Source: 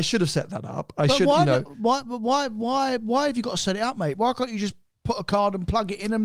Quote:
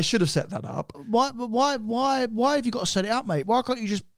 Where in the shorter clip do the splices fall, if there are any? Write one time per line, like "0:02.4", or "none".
0:00.9